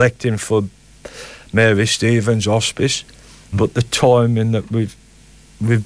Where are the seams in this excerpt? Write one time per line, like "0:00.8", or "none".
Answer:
0:03.5